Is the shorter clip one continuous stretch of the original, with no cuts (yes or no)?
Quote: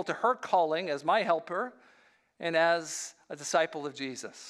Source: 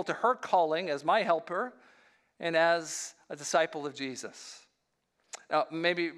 yes